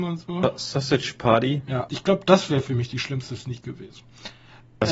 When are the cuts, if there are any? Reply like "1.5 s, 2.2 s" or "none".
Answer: 1.9 s